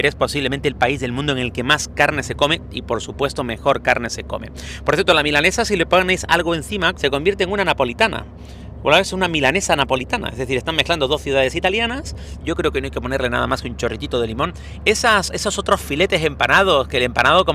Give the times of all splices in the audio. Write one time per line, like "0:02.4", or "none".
0:06.9
0:12.4
0:14.8